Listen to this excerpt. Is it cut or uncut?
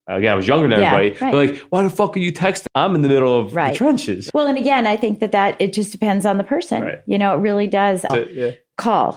cut